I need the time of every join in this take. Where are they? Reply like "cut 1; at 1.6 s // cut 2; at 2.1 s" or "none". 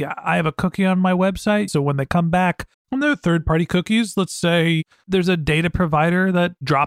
cut 1; at 1.7 s // cut 2; at 2.7 s